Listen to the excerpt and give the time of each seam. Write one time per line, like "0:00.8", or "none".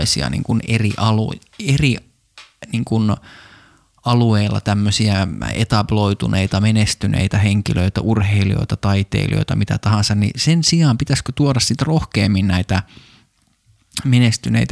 none